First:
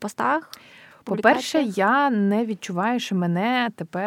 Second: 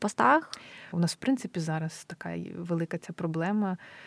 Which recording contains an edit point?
second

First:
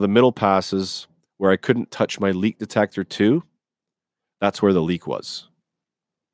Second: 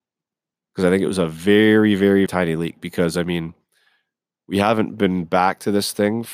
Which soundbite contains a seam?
second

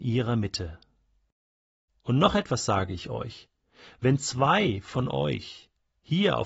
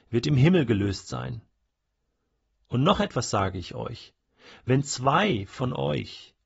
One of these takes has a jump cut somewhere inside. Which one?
first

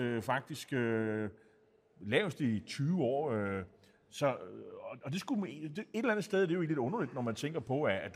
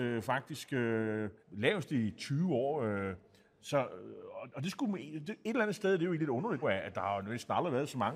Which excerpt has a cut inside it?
second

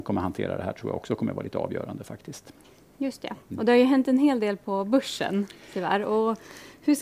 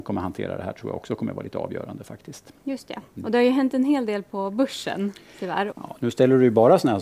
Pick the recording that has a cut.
second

